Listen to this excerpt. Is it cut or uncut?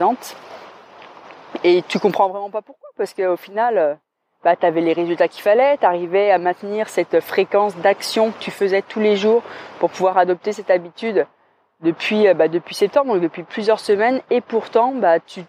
cut